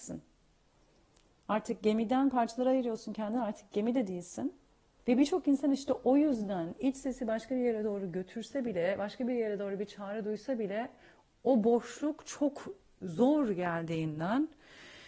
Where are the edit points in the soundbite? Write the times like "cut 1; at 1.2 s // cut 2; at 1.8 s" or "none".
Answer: cut 1; at 5.0 s // cut 2; at 11.3 s

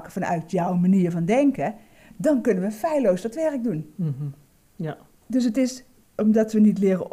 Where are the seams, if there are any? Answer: none

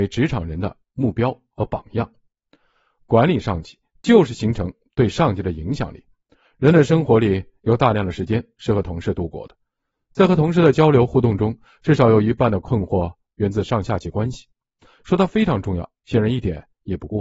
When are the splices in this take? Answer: none

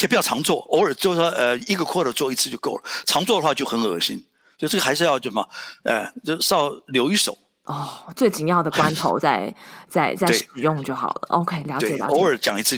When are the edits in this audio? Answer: none

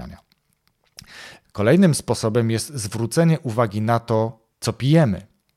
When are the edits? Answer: cut 1; at 1.4 s // cut 2; at 4.5 s

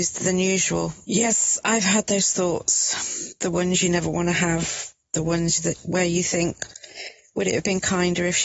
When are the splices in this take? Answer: cut 1; at 1.0 s

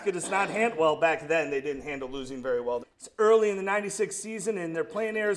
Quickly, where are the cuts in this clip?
cut 1; at 2.8 s

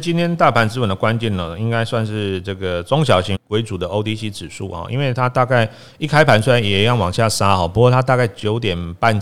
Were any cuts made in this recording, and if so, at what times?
cut 1; at 3.3 s

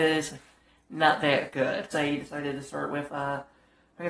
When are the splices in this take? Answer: cut 1; at 1.9 s

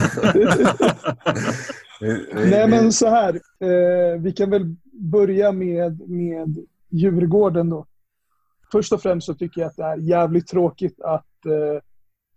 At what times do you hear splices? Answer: none

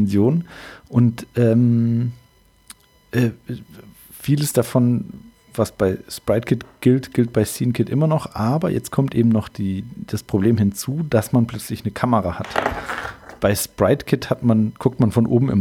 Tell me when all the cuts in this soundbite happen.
none

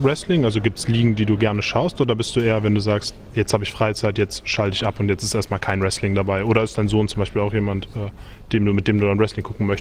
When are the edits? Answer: none

